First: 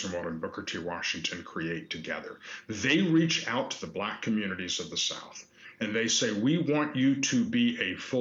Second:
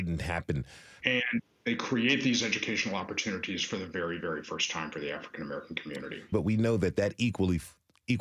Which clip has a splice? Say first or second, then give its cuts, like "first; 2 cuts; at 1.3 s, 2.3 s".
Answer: second; 2 cuts; at 1.0 s, 6.3 s